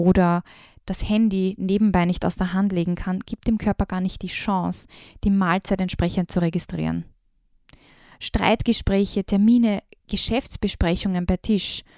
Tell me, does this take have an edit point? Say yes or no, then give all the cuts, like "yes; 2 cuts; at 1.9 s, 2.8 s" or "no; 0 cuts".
no; 0 cuts